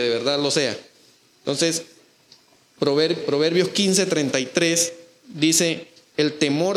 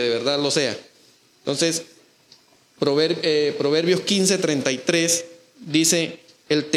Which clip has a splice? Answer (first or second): first